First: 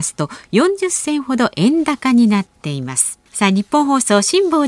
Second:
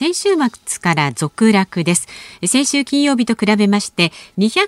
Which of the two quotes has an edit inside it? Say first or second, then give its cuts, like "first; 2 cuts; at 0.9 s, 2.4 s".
first; 1 cut; at 3.3 s